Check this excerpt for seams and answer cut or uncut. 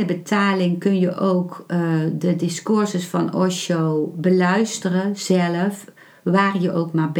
uncut